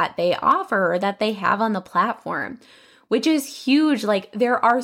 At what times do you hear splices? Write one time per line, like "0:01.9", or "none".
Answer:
none